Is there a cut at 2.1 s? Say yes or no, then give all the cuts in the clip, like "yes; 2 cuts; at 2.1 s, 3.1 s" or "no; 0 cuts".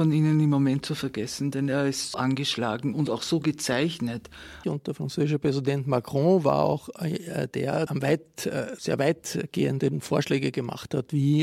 yes; 3 cuts; at 2.1 s, 4.6 s, 7.9 s